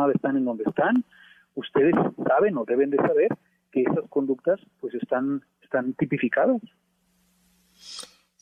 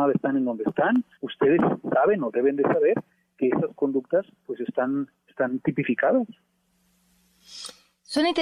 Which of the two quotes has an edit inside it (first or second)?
second